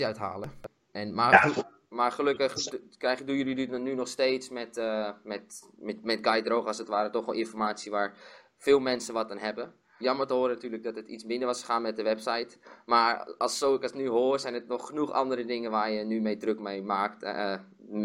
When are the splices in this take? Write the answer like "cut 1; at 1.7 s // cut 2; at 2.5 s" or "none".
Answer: cut 1; at 10.0 s